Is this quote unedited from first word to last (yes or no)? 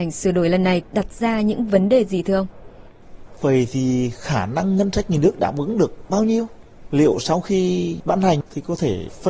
yes